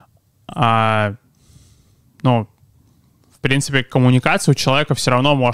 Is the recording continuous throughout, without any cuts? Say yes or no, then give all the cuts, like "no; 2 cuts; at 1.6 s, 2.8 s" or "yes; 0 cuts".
yes; 0 cuts